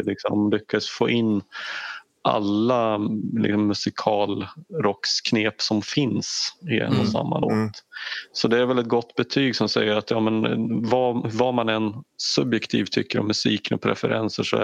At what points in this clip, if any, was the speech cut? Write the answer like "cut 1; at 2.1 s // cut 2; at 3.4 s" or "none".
none